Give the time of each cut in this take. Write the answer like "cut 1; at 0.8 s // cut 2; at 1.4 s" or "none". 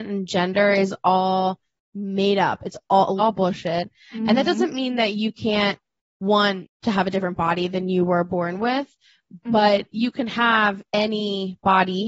cut 1; at 3.2 s